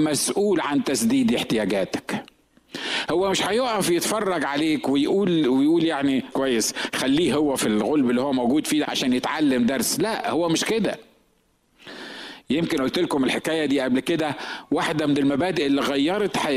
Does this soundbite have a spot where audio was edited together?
yes; 3 cuts; at 6.3 s, 7.6 s, 8.8 s

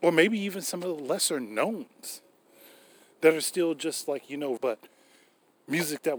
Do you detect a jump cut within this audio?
yes; 1 cut; at 4.6 s

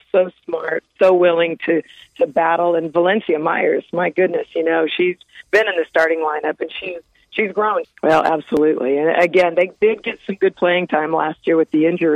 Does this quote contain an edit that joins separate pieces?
yes; 1 cut; at 7.8 s

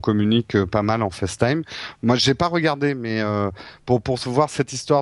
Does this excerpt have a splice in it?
no; 0 cuts

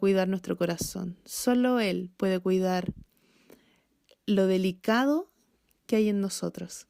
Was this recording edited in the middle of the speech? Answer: no; 0 cuts

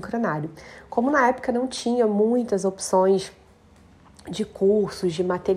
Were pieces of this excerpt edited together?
no; 0 cuts

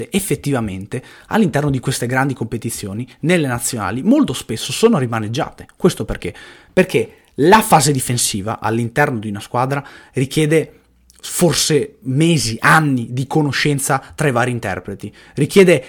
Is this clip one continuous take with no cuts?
yes; 0 cuts

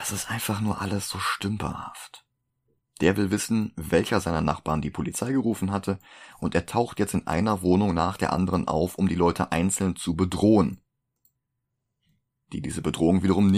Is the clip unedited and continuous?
no; 1 cut; at 2.8 s

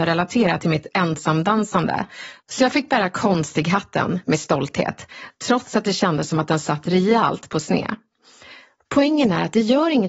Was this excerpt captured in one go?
yes; 0 cuts

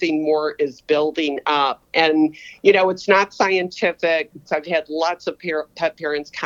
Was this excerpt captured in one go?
no; 1 cut; at 4.5 s

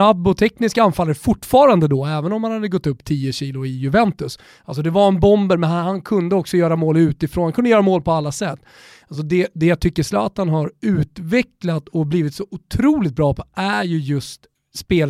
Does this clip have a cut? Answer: no; 0 cuts

